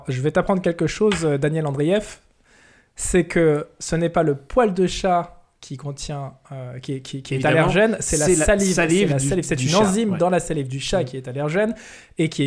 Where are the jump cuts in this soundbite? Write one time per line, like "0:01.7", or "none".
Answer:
none